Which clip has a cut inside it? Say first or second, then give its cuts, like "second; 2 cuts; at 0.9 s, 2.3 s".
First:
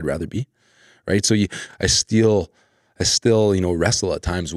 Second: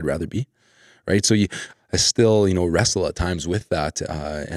second; 1 cut; at 1.7 s